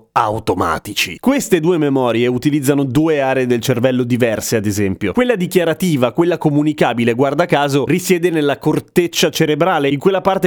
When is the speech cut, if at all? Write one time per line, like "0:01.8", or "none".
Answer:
none